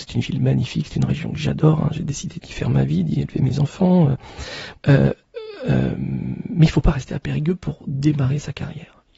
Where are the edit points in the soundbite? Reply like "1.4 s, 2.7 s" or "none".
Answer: 4.8 s